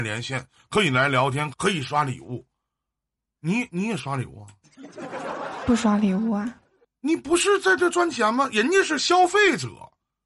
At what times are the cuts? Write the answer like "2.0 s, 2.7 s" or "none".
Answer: 1.5 s